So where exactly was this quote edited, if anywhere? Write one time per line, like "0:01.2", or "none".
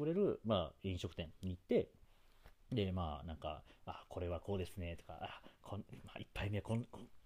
none

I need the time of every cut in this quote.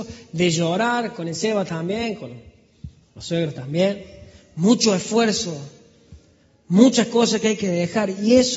none

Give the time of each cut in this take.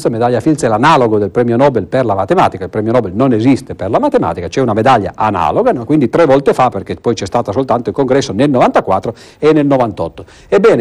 0:05.9

